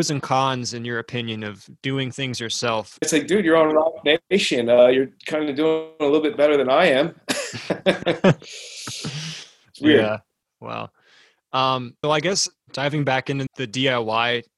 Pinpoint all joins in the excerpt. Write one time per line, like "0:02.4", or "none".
0:03.0
0:12.0
0:13.5

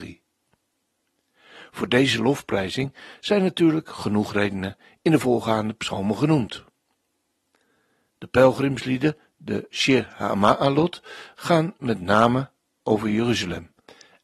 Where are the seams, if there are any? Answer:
none

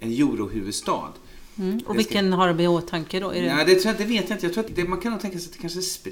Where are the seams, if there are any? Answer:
0:04.7

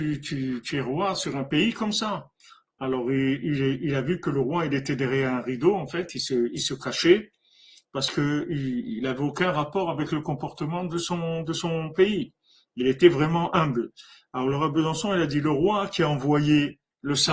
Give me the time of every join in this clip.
none

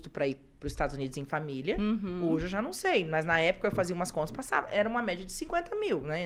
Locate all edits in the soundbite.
none

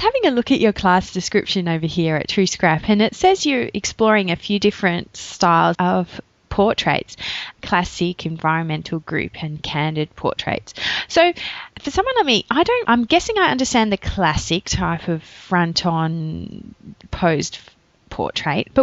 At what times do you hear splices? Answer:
0:05.8
0:11.7
0:12.9

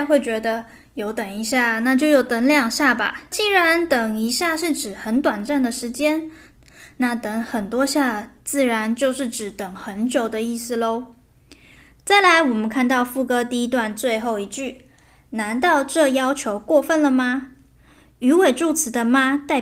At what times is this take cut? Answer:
none

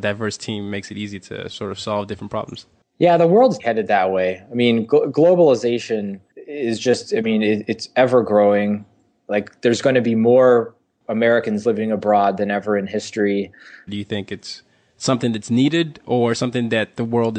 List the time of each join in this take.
0:03.6
0:13.9

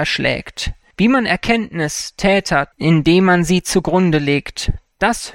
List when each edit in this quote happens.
0:00.9
0:02.7

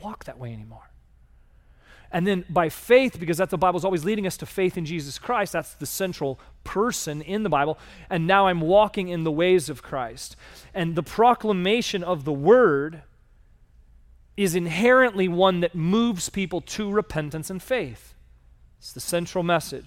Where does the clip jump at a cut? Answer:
none

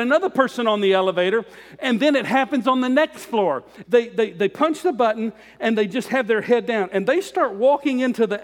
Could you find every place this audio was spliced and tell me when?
0:03.8

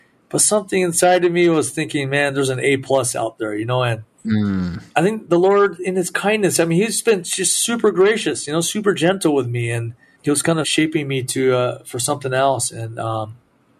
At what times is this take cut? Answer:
none

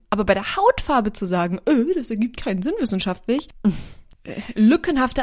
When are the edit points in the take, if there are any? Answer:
none

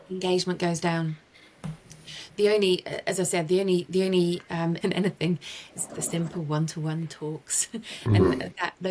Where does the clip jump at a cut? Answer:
0:04.8
0:05.9

